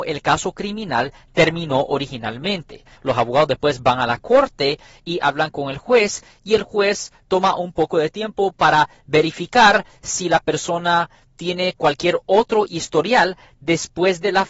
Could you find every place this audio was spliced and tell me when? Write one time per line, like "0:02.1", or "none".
0:03.0